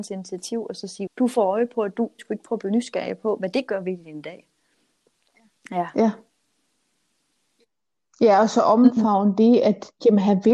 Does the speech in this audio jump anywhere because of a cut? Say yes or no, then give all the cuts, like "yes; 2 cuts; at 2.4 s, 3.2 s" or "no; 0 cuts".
yes; 2 cuts; at 1.1 s, 2.2 s